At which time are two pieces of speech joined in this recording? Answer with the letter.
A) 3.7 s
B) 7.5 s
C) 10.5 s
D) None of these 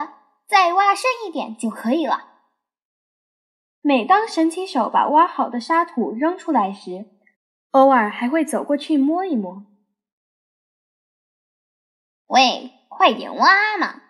B